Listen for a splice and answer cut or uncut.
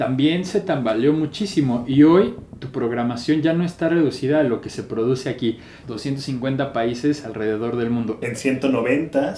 cut